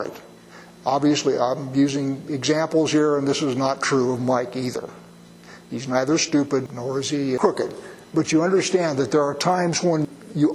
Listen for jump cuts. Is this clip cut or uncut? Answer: uncut